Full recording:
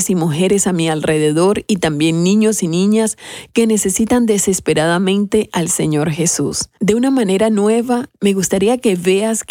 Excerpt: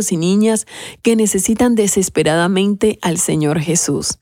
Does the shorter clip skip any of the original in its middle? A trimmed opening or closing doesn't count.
no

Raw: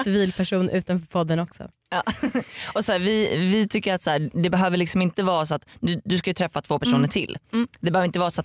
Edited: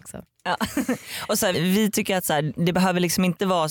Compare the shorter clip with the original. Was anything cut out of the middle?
yes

